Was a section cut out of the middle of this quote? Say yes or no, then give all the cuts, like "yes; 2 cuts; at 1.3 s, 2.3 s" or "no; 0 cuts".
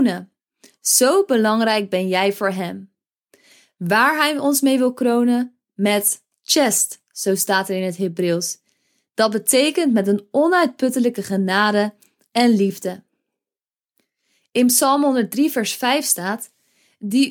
no; 0 cuts